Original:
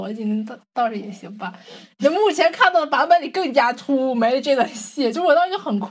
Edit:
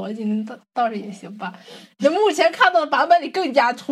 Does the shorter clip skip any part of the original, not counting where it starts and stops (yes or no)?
no